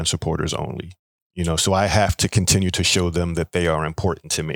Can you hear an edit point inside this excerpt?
yes; 1 cut; at 1.2 s

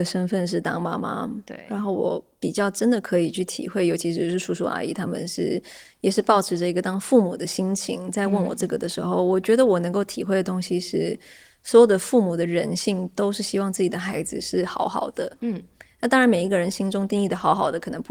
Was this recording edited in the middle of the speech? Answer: no; 0 cuts

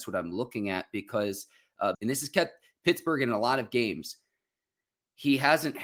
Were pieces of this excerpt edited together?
yes; 1 cut; at 1.9 s

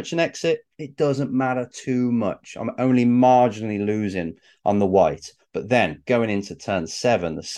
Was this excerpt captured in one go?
yes; 0 cuts

